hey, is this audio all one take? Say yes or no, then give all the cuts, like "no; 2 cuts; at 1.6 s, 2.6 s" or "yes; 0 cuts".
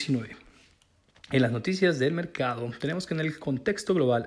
yes; 0 cuts